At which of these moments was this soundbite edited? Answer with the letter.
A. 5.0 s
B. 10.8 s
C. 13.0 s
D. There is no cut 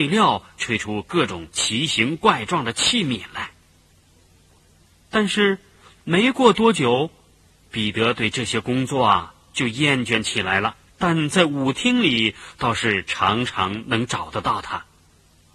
B